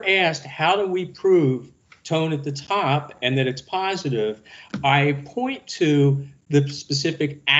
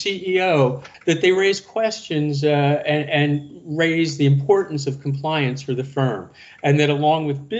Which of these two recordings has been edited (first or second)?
second